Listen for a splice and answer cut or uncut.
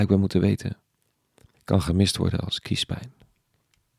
cut